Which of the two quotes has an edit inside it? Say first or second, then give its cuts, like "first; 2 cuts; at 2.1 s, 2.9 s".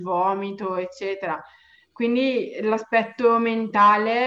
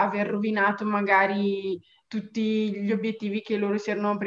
second; 1 cut; at 2.1 s